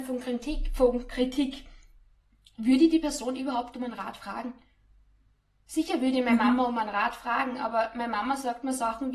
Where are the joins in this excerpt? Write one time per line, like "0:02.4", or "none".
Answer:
none